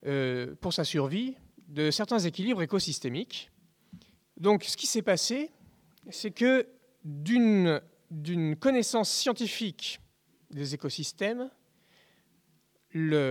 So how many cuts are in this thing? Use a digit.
1